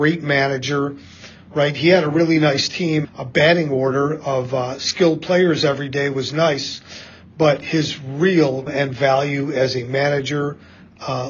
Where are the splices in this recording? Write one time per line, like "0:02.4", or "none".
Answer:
0:03.0
0:08.7